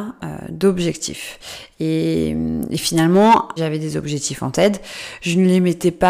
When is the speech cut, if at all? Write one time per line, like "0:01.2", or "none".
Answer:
0:01.7
0:03.6